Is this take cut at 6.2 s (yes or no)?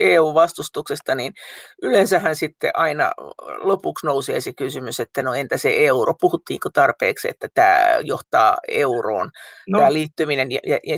no